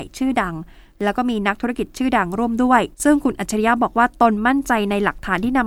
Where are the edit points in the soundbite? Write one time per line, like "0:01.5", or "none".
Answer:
0:02.9

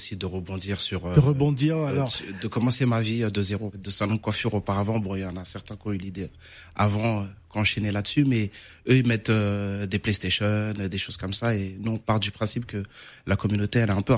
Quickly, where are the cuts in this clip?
0:03.7

